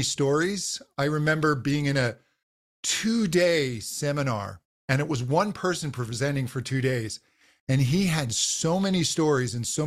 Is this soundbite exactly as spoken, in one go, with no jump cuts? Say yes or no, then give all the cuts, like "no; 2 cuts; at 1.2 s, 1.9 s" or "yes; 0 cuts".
yes; 0 cuts